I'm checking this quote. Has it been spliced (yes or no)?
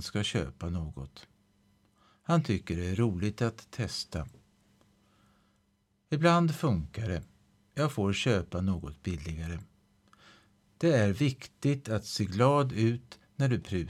no